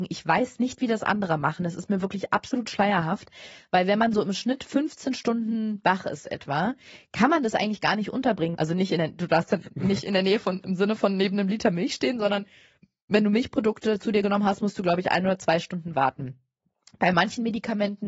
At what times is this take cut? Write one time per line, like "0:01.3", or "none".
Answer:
0:08.5